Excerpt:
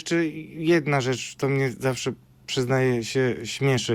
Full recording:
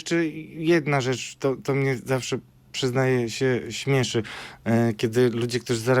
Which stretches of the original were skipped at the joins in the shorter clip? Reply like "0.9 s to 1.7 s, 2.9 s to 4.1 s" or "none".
1.4 s to 1.6 s

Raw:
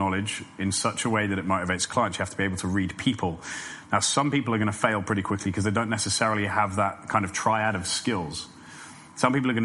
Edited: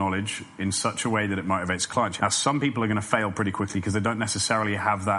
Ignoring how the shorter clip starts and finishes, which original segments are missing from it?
2.2 s to 3.9 s

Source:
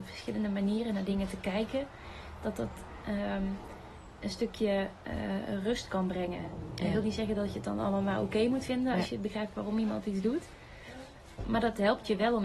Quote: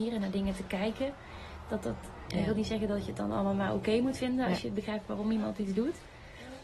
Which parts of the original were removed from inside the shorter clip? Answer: 3.0 s to 6.8 s

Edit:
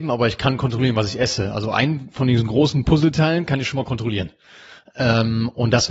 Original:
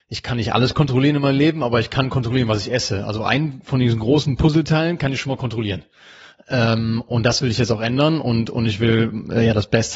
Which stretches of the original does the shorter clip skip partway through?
none

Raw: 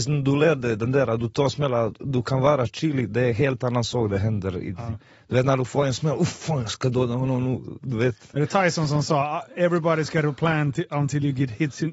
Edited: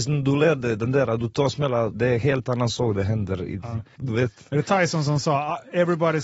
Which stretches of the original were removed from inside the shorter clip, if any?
1.9 s to 3.1 s, 5.1 s to 7.8 s

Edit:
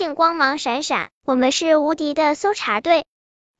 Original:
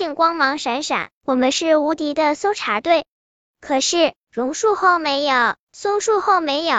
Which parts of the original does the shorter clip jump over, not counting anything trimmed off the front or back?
none

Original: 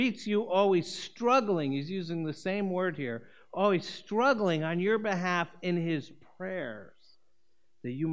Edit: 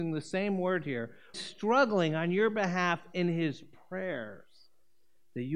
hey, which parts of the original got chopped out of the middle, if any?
3.5 s to 3.8 s

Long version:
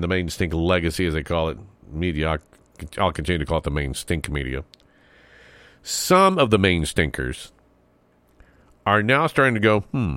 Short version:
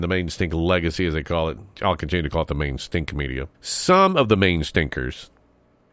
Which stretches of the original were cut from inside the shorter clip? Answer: 1.7 s to 2.9 s, 4.7 s to 5.8 s

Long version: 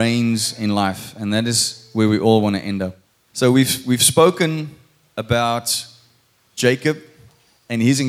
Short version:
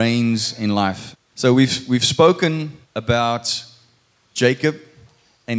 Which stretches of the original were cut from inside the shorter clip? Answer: 1.1 s to 3.1 s, 4.8 s to 5.1 s

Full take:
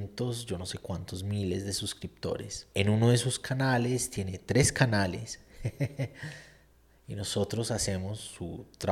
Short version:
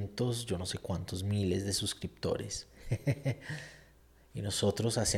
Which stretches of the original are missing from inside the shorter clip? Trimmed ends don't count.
2.7 s to 5.4 s

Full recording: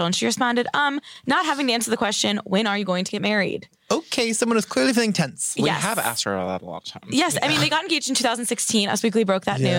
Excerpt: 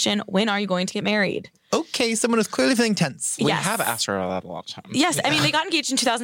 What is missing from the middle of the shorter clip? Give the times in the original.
none

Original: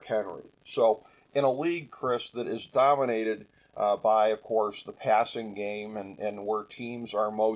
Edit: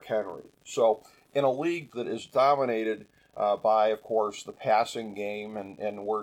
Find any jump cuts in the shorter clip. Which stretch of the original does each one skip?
1.9 s to 2.3 s

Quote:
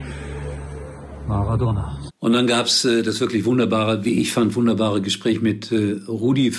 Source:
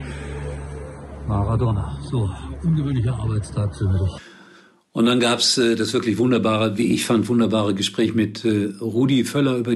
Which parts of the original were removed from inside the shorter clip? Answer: 2.1 s to 4.8 s

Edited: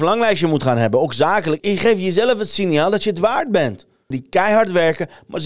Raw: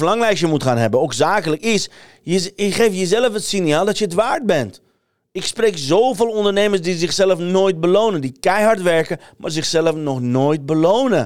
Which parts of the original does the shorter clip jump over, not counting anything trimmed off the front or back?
1.6 s to 2.5 s, 5.0 s to 8.2 s

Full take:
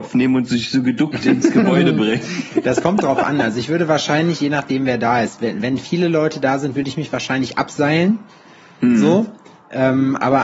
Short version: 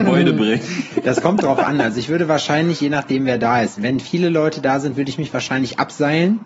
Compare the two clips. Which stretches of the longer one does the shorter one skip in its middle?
5.4 s to 5.6 s

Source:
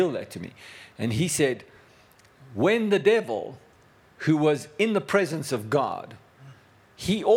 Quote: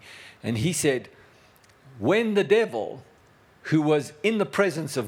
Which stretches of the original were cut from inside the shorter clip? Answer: none

